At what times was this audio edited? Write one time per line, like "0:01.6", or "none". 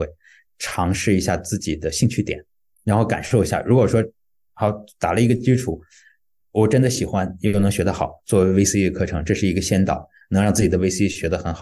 none